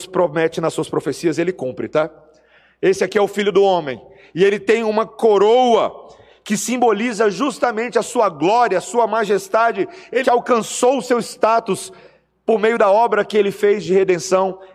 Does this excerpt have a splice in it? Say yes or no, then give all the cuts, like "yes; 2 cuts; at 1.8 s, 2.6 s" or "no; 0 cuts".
yes; 1 cut; at 10.2 s